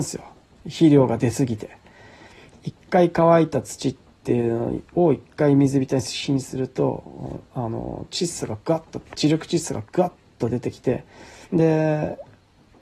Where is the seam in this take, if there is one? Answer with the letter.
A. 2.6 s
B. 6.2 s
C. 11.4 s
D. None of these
C